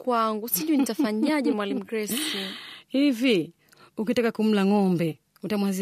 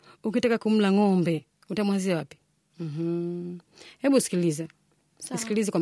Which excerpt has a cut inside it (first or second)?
second